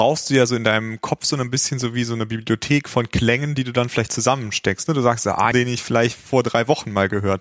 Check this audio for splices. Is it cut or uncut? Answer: cut